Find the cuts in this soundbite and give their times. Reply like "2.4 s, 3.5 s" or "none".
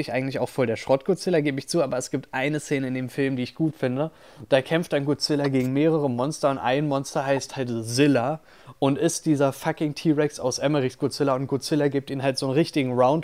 none